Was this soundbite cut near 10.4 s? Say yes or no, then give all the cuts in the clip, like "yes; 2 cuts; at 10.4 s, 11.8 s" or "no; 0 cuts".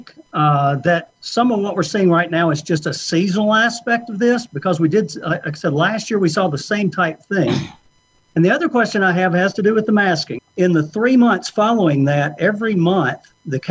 yes; 1 cut; at 10.4 s